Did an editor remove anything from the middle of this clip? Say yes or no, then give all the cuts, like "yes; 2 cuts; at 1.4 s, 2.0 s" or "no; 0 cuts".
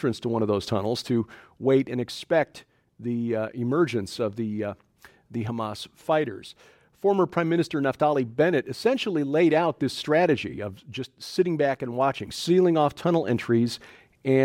no; 0 cuts